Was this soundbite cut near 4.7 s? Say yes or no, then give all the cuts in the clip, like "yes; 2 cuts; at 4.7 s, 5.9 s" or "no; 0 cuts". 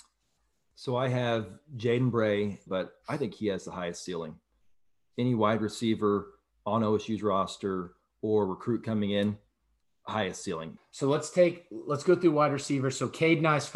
no; 2 cuts; at 2.7 s, 10.8 s